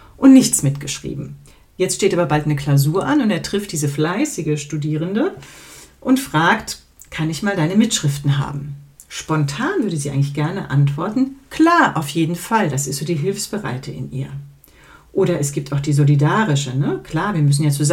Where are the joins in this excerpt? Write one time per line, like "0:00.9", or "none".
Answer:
none